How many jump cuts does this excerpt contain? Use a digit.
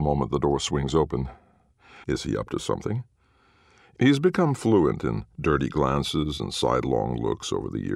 1